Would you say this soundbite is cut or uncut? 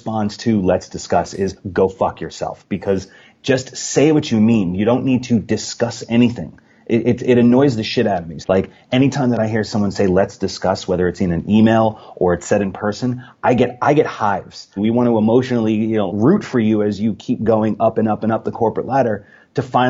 cut